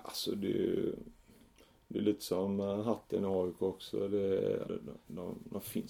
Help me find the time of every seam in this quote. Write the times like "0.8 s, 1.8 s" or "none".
4.6 s

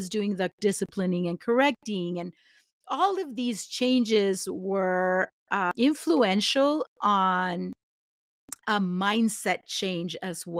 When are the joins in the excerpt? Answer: 8.6 s

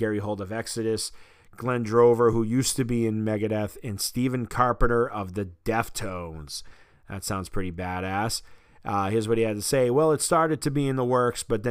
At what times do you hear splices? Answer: none

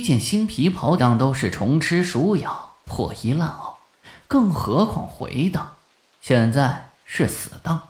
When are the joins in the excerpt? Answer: 1.0 s, 6.1 s

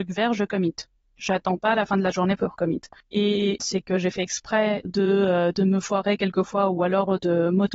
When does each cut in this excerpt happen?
3.6 s, 4.8 s

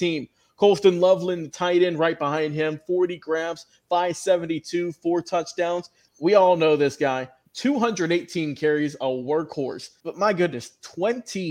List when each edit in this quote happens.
6.1 s, 7.5 s, 10.0 s

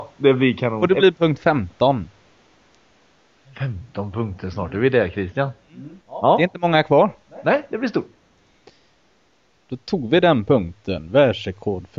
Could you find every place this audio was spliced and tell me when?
6.0 s

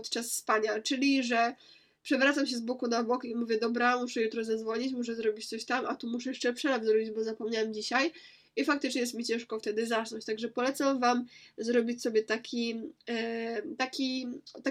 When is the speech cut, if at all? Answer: none

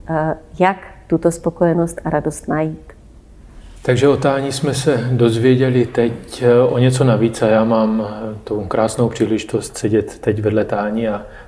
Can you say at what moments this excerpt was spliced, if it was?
none

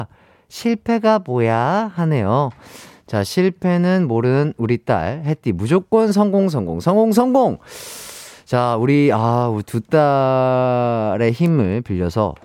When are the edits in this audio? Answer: none

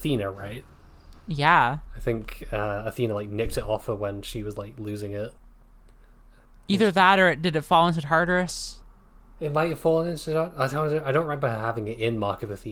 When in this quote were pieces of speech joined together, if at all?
none

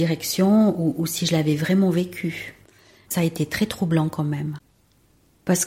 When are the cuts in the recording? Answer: 3.0 s

